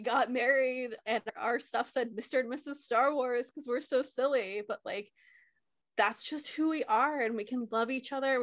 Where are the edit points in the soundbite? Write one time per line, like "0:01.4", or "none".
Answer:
none

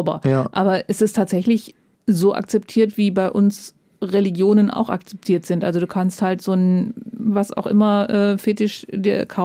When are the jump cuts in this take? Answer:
none

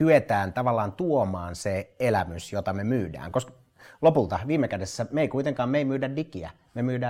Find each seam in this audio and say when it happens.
none

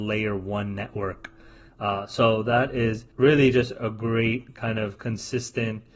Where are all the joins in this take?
0:01.7
0:03.1

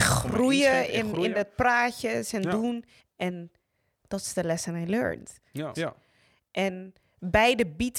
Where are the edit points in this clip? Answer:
0:03.0
0:05.7

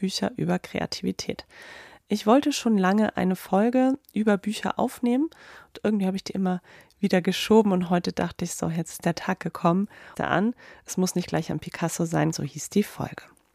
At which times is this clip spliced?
0:10.1
0:12.3

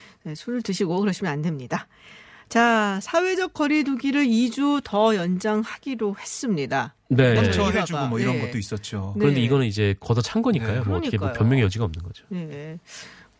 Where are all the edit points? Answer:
0:07.4

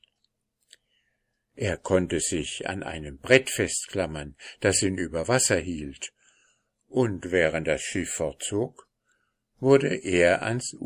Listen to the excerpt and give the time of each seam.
none

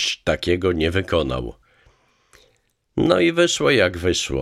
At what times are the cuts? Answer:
none

